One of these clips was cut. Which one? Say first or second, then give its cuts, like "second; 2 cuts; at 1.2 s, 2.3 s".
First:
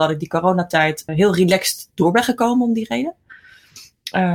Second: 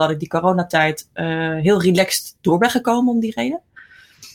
first; 1 cut; at 1.1 s